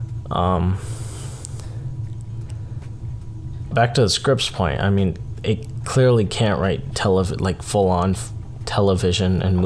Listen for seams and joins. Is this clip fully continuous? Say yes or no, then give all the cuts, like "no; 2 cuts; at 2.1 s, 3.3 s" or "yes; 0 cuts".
no; 1 cut; at 3.7 s